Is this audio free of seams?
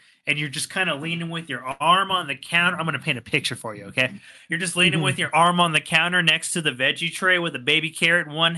yes; 0 cuts

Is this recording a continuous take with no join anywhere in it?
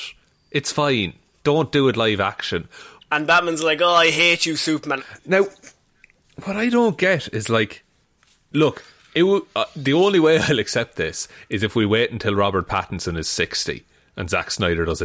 no; 2 cuts; at 3.0 s, 5.0 s

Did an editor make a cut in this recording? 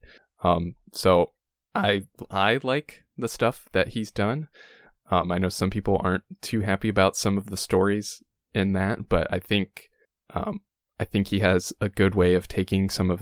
no; 0 cuts

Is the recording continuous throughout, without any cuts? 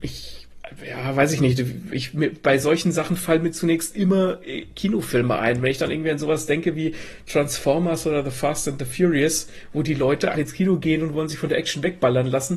no; 1 cut; at 10.3 s

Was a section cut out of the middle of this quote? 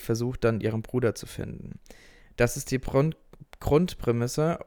no; 0 cuts

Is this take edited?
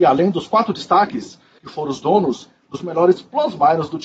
yes; 1 cut; at 1.6 s

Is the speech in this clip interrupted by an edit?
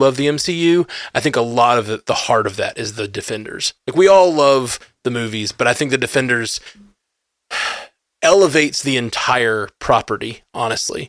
no; 0 cuts

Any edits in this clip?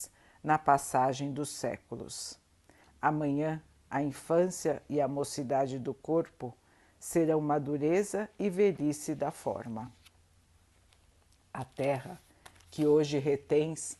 yes; 1 cut; at 2.8 s

